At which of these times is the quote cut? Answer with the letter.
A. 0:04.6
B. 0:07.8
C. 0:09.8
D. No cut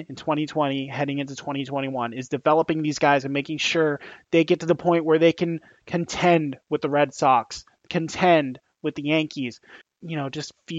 C